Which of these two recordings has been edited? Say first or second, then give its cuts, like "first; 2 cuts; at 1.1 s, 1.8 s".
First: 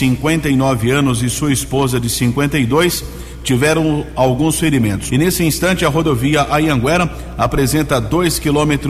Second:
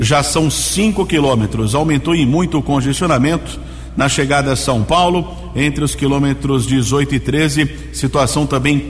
first; 1 cut; at 5.1 s